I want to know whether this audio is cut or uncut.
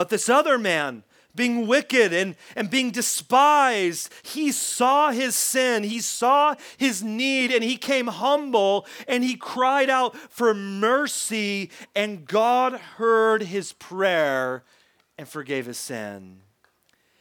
uncut